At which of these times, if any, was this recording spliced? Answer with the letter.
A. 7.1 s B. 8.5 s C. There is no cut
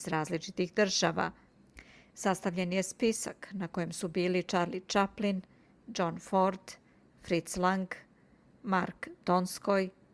C